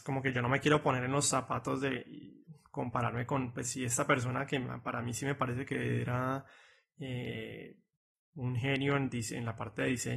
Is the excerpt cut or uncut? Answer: uncut